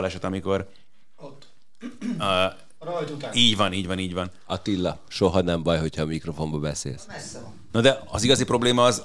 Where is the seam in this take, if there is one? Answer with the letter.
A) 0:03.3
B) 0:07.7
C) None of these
B